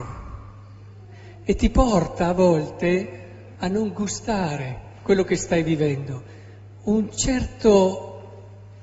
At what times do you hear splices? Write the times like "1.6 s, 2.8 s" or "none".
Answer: 3.5 s